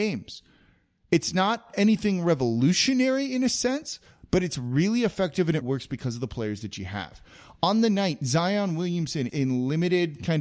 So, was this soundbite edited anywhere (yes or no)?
yes